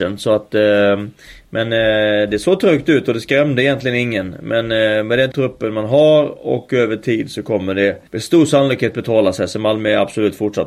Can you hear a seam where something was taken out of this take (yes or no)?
yes